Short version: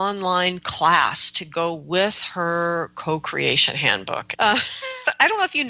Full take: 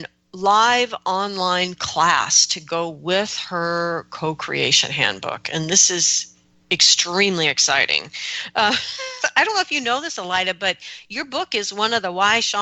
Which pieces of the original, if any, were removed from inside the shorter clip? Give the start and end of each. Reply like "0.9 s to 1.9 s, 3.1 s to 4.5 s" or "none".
5.5 s to 8.5 s